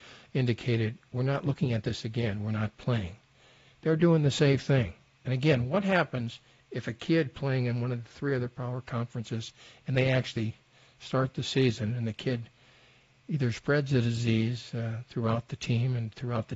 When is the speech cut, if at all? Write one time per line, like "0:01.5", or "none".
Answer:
none